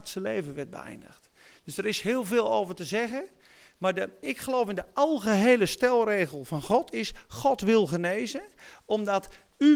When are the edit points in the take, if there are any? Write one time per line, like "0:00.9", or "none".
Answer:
0:04.2